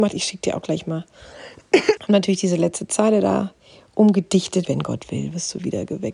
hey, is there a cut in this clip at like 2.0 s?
yes; 2 cuts; at 2.0 s, 4.7 s

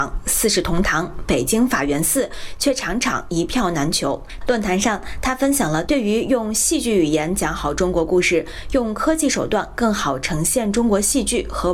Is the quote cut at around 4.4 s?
yes; 1 cut; at 4.4 s

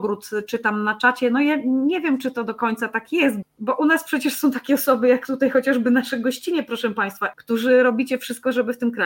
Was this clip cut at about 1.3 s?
no; 2 cuts; at 3.4 s, 7.3 s

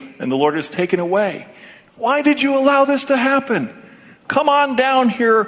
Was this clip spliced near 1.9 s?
yes; 2 cuts; at 1.9 s, 4.3 s

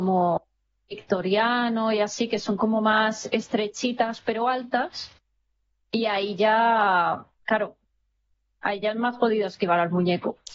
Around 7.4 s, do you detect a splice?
no; 0 cuts

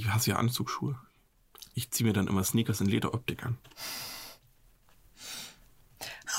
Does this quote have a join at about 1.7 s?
yes; 1 cut; at 1.7 s

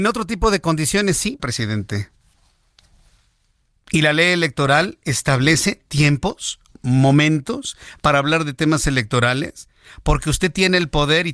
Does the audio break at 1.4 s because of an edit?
yes; 1 cut; at 1.4 s

